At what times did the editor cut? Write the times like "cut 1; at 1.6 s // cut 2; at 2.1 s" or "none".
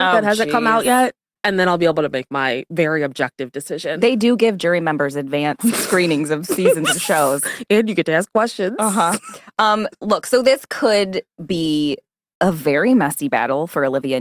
none